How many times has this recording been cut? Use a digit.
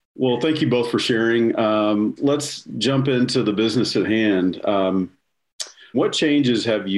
2